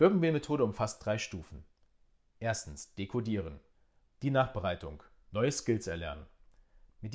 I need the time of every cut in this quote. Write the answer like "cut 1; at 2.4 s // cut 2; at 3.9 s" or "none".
cut 1; at 4.0 s